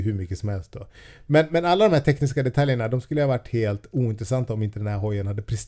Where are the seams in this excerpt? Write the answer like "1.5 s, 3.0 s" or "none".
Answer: none